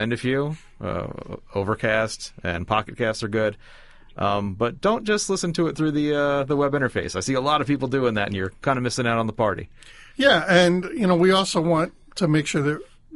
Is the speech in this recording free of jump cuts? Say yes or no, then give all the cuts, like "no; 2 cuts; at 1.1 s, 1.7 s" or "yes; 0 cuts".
yes; 0 cuts